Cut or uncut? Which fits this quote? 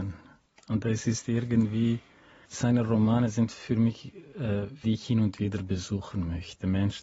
cut